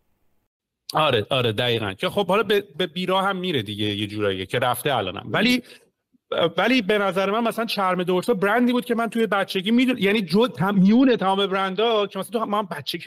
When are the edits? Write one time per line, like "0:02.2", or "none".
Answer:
none